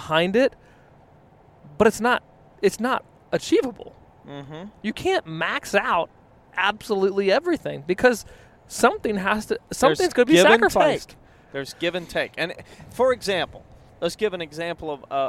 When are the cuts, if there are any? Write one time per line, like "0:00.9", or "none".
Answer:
none

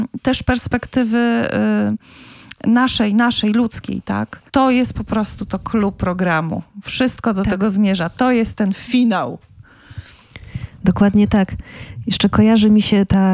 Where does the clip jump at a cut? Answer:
0:04.5

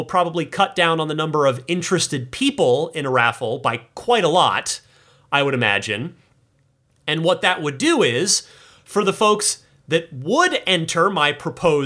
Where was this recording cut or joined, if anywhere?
none

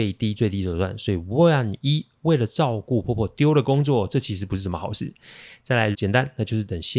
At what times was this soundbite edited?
0:05.9

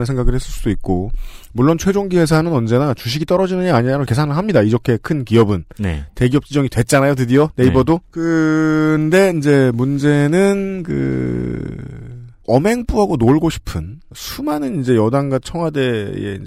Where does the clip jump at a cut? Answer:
0:04.1

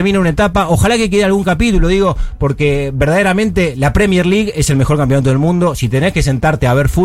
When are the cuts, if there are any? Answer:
none

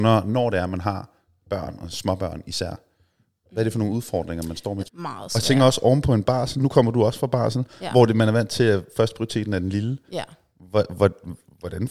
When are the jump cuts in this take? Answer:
0:04.8

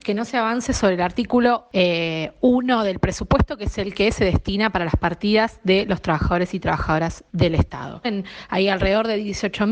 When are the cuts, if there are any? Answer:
0:08.0

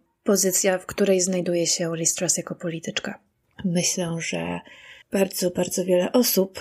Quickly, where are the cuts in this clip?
0:03.4
0:05.0

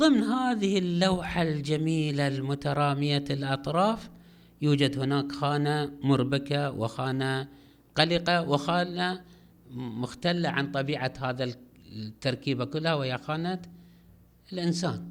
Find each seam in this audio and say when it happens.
none

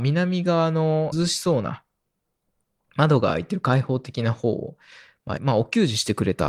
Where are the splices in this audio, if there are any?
0:01.1
0:05.4

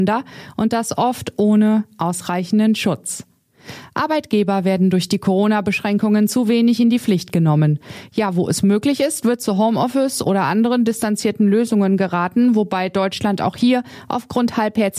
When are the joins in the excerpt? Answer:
none

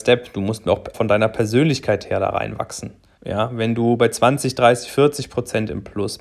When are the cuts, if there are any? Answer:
0:00.9
0:03.2

